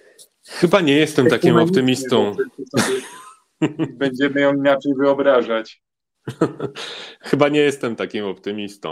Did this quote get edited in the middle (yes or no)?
no